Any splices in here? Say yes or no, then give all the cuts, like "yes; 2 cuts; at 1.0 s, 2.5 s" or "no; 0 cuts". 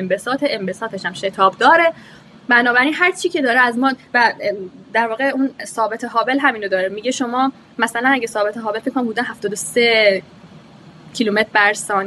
yes; 1 cut; at 6.9 s